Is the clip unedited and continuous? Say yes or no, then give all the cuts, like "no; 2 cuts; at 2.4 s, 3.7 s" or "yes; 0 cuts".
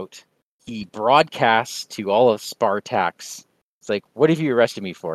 yes; 0 cuts